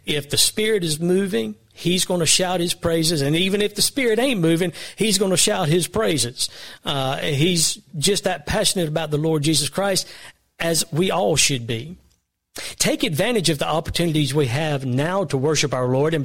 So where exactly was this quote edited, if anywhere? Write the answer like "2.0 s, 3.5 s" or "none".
none